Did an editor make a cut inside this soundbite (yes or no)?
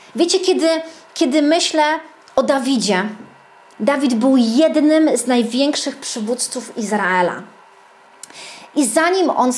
no